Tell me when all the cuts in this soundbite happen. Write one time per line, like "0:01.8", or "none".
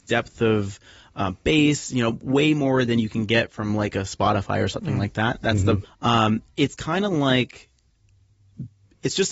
0:05.8